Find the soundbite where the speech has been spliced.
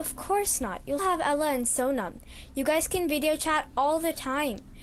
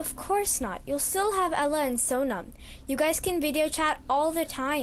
first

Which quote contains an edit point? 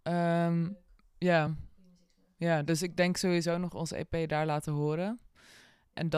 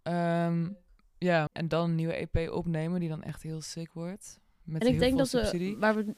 second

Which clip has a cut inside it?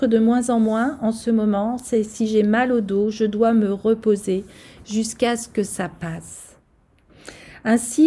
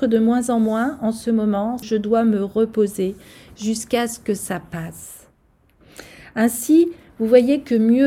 second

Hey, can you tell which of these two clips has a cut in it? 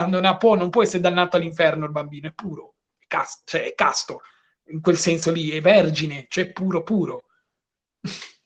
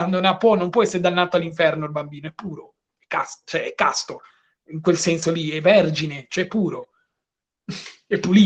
second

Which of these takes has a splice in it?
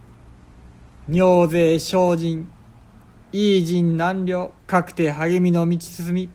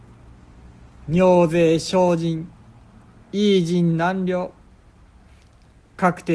first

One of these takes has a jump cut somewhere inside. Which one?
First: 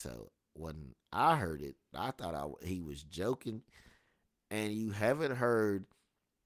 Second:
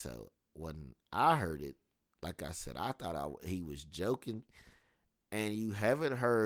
first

